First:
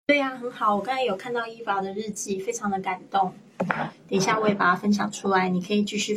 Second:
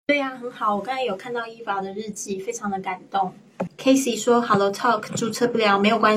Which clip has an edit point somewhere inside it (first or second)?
second